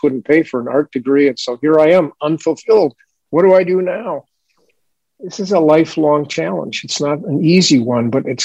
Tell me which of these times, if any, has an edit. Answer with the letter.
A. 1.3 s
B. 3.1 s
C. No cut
C